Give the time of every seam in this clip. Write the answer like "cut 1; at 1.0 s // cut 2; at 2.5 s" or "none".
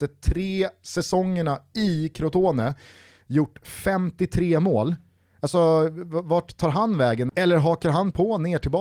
none

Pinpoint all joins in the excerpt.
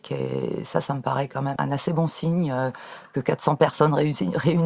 cut 1; at 1.6 s

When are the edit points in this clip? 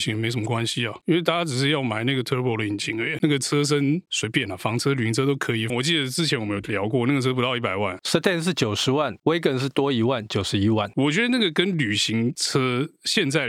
cut 1; at 5.7 s

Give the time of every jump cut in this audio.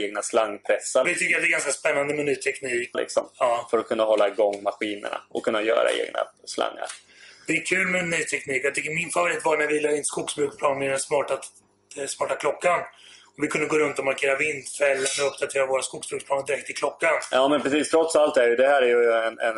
cut 1; at 1.0 s // cut 2; at 2.9 s

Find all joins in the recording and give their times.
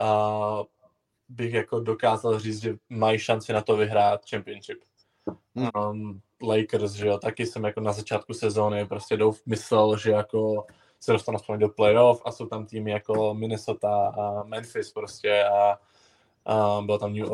cut 1; at 5.7 s

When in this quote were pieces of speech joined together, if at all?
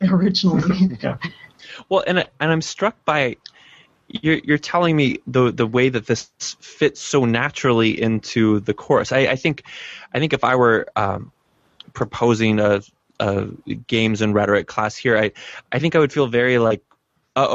none

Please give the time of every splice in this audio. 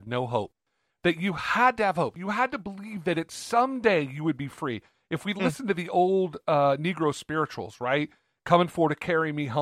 none

